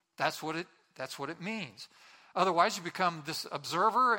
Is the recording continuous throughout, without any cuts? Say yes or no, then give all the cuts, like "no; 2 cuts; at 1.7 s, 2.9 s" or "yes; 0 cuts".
yes; 0 cuts